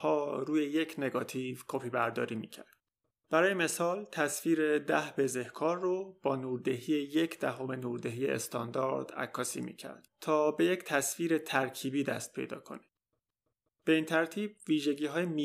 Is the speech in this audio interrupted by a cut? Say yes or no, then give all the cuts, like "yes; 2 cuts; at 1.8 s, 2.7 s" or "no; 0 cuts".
no; 0 cuts